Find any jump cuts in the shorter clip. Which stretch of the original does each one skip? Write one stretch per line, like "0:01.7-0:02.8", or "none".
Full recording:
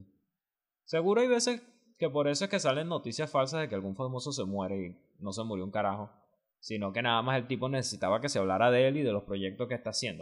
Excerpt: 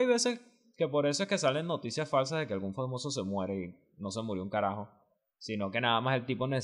none